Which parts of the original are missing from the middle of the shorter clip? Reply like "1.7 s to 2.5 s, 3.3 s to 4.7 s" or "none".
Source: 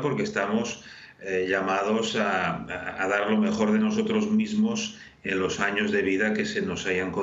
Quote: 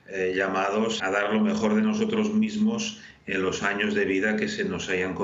2.1 s to 3.0 s